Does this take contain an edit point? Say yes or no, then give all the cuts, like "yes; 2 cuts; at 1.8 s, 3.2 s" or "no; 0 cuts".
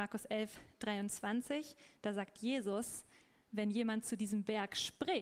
no; 0 cuts